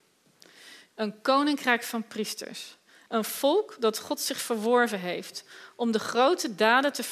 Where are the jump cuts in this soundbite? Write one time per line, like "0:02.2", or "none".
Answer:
0:00.9
0:03.1

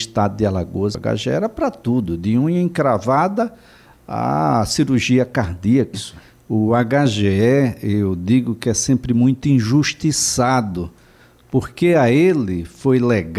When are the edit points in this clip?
0:00.9
0:05.9

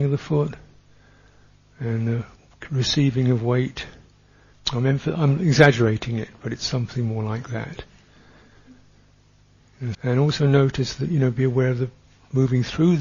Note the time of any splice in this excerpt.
0:04.5
0:09.9

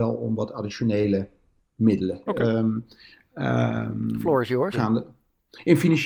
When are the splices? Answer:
0:02.3
0:04.7

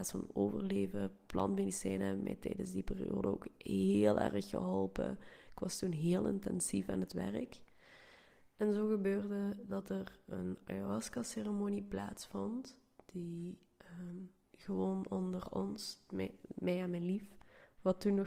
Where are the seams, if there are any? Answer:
none

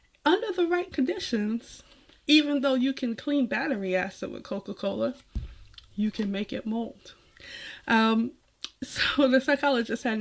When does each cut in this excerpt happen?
none

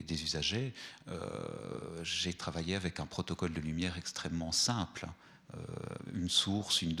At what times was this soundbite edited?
none

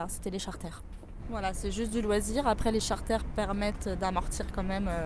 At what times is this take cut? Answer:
0:01.2

